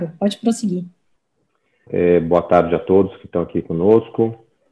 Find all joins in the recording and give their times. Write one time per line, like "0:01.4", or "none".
0:01.9